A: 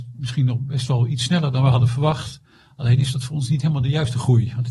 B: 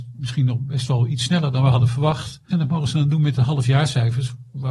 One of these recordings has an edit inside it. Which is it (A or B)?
B